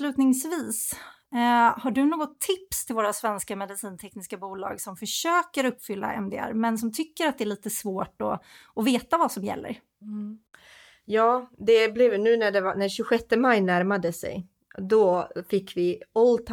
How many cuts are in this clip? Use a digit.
0